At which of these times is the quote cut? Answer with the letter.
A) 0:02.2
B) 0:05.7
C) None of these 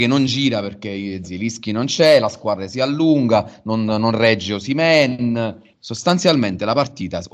B